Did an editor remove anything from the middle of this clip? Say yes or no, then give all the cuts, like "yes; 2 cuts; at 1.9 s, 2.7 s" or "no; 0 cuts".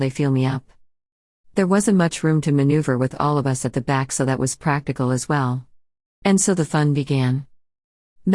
yes; 2 cuts; at 1.5 s, 6.2 s